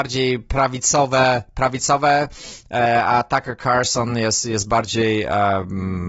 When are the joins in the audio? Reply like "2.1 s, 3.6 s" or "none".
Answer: none